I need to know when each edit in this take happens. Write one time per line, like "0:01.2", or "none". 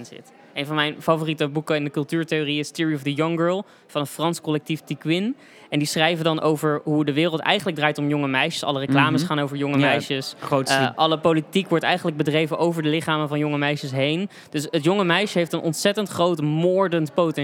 0:10.9